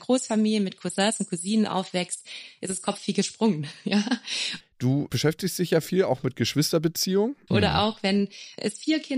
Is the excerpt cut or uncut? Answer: cut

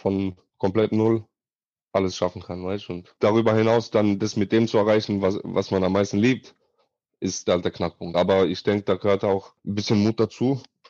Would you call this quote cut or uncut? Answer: uncut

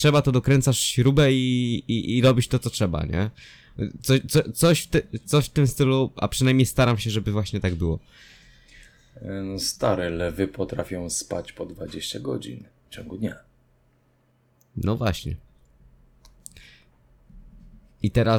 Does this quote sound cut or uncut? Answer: uncut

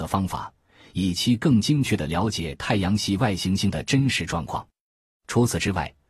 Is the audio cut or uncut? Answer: uncut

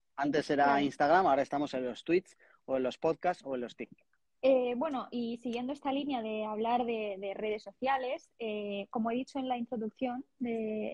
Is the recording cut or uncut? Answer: cut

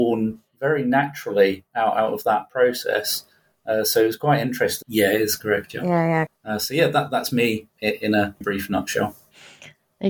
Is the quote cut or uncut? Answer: cut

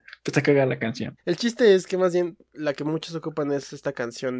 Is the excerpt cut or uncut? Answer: cut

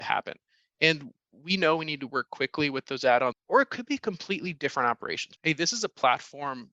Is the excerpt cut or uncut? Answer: cut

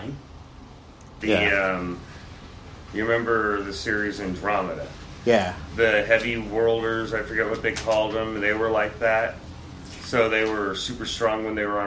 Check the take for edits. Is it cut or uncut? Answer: cut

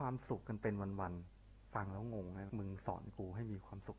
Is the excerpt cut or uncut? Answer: cut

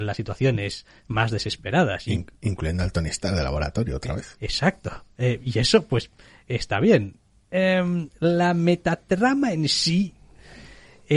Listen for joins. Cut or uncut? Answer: uncut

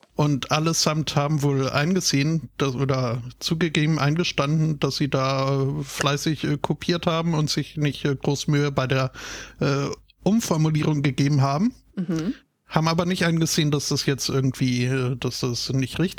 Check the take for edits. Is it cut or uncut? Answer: uncut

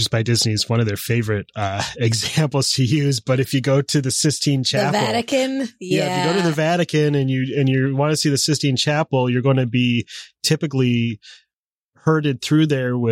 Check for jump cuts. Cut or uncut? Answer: uncut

